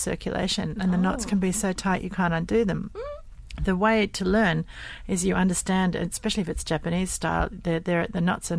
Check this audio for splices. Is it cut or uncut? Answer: uncut